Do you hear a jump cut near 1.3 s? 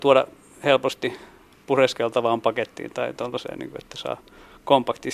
no; 0 cuts

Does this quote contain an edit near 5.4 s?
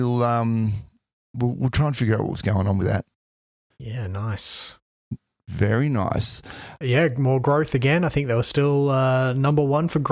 no; 2 cuts; at 3.7 s, 6.8 s

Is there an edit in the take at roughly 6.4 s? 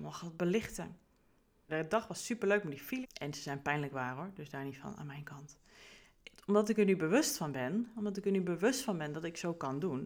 no; 3 cuts; at 1.7 s, 3.0 s, 7.9 s

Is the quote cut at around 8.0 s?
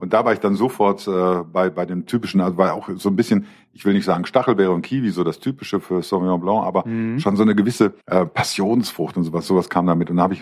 yes; 1 cut; at 8.0 s

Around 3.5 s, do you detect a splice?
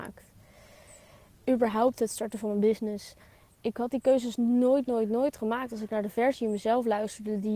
yes; 1 cut; at 3.5 s

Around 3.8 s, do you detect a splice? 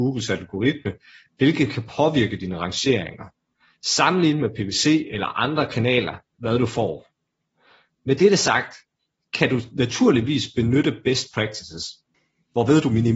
no; 1 cut; at 6.4 s

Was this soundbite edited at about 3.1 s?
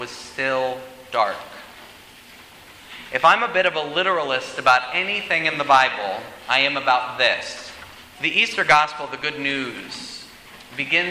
no; 1 cut; at 8.1 s

